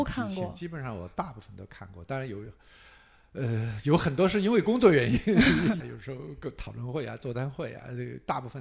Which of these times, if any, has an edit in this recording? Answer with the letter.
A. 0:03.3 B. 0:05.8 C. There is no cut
B